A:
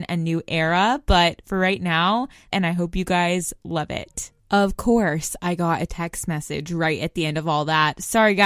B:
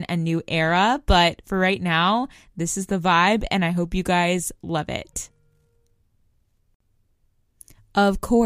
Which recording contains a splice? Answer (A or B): A